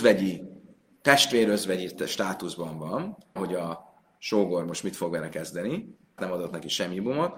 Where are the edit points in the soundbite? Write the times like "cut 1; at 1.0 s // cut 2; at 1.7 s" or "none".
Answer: cut 1; at 3.4 s // cut 2; at 6.2 s